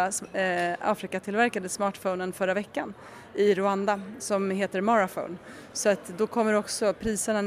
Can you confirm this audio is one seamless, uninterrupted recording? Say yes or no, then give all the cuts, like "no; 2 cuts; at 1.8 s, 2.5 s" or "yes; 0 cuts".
yes; 0 cuts